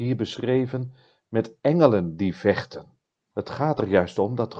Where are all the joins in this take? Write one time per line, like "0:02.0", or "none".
0:03.2